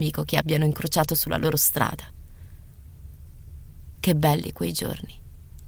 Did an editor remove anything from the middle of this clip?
yes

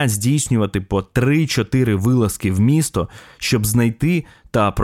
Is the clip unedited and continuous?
yes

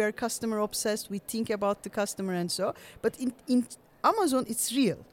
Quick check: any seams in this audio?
no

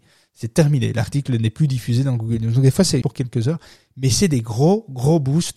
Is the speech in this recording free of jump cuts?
no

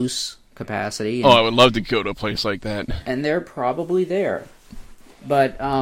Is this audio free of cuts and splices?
yes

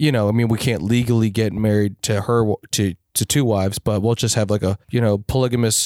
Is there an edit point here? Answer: yes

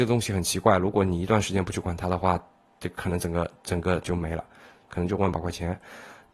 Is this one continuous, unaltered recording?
no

